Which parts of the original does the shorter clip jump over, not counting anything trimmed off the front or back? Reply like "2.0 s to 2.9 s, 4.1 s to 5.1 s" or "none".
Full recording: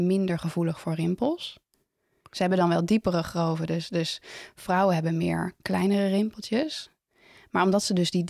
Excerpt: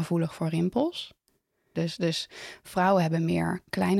2.2 s to 3.7 s